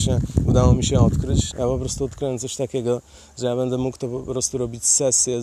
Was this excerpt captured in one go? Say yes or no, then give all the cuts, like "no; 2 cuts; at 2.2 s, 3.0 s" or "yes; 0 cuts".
no; 1 cut; at 1.5 s